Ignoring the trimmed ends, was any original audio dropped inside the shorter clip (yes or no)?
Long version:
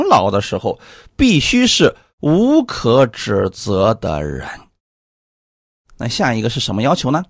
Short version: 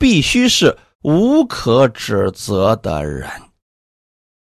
no